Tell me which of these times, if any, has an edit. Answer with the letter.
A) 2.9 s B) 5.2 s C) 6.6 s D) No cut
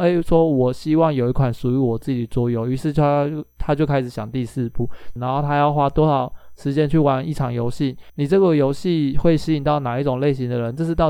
B